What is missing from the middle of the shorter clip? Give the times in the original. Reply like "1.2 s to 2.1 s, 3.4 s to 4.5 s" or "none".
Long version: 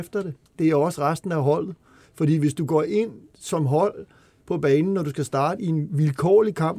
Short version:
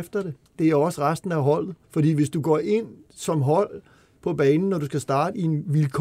1.8 s to 2.1 s